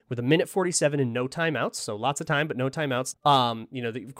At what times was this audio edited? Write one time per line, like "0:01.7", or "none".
0:03.1